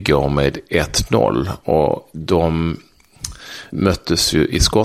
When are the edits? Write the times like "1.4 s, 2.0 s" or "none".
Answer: 3.7 s